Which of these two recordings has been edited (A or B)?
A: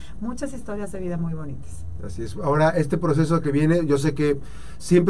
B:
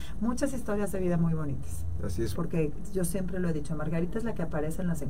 B